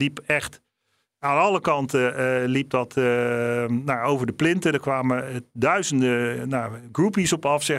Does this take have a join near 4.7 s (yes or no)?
no